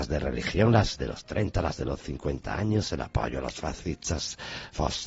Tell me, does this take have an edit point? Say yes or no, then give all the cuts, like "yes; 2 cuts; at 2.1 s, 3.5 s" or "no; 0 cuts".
no; 0 cuts